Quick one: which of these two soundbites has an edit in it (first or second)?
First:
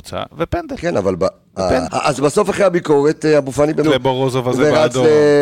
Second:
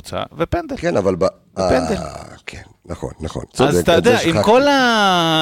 first